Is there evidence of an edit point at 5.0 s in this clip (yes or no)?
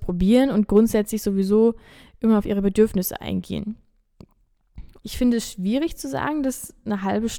yes